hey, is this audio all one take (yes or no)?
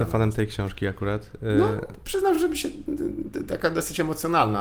yes